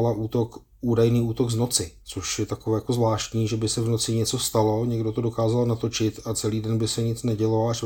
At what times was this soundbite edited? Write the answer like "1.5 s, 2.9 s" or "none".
2.0 s